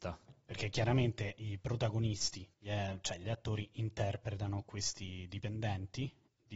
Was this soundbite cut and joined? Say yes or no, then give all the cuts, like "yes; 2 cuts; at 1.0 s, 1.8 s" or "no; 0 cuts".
yes; 1 cut; at 2.5 s